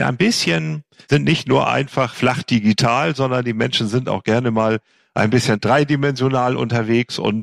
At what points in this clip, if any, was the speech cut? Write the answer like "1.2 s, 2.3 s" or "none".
none